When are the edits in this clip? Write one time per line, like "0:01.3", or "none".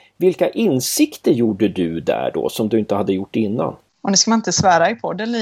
none